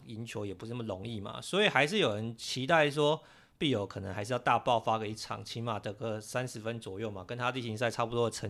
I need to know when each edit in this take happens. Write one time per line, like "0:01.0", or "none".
none